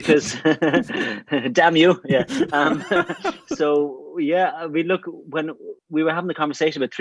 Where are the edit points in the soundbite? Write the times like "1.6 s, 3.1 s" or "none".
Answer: 5.8 s